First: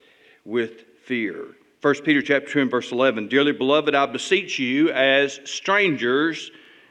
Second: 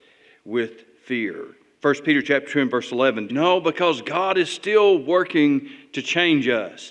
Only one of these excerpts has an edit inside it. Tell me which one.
second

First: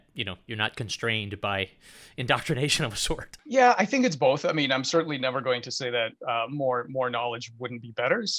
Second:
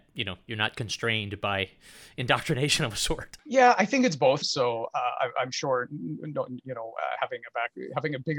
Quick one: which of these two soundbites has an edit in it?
second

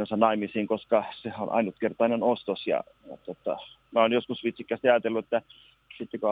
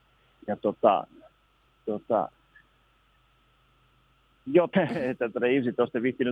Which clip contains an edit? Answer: second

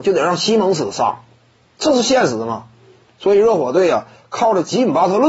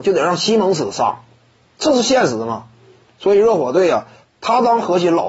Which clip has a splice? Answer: second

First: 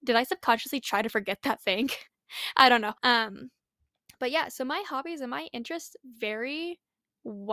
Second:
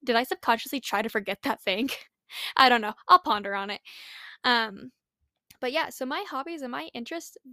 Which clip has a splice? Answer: first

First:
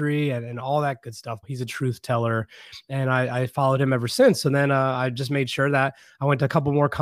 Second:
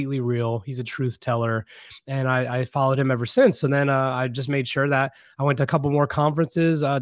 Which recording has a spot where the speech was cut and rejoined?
first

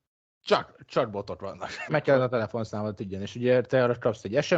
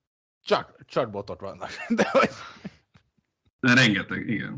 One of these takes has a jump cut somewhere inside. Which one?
first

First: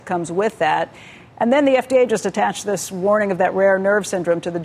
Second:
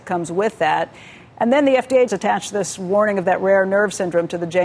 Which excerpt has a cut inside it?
second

